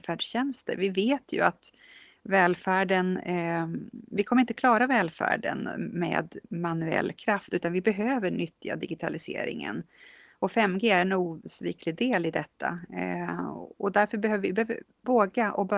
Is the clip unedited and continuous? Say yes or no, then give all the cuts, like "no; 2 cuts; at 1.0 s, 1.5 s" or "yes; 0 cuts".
yes; 0 cuts